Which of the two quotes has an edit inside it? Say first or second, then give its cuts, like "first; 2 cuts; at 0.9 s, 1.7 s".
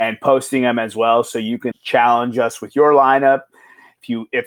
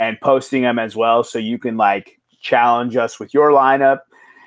first; 1 cut; at 1.7 s